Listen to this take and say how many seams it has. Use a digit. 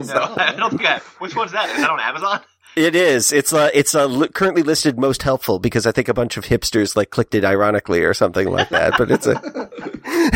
0